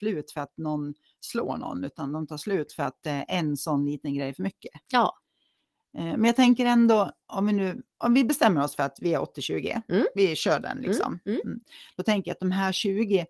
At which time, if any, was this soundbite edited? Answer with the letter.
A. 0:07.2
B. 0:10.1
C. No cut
A